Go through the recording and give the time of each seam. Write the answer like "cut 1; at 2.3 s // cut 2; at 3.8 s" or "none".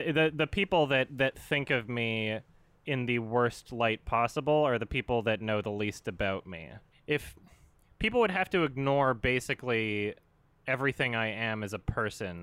cut 1; at 6.9 s